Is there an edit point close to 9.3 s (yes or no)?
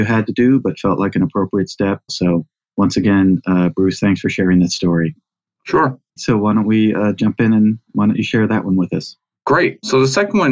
no